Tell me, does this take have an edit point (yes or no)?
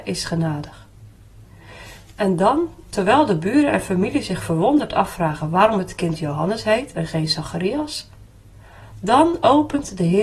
no